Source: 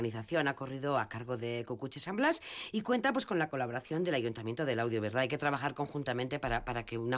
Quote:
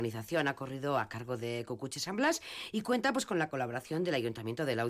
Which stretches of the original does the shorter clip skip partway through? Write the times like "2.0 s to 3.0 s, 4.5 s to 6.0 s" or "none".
none